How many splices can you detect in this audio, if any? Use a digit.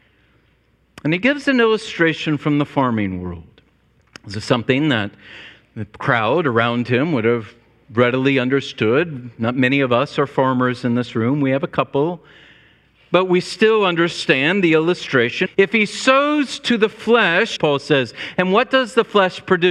2